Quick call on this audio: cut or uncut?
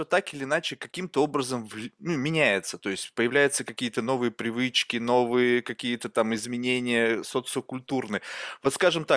uncut